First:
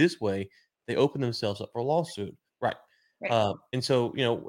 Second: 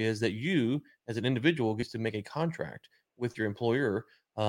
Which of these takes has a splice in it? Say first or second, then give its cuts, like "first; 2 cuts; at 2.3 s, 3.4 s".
first; 1 cut; at 2.5 s